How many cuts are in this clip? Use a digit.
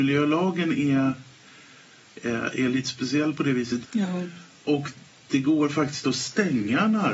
1